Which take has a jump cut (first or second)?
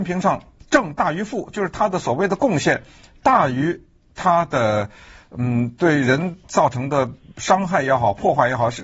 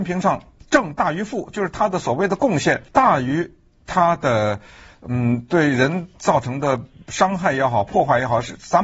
second